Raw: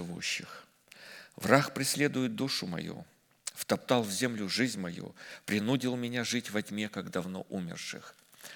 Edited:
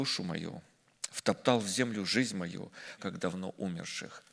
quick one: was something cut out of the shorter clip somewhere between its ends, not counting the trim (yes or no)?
yes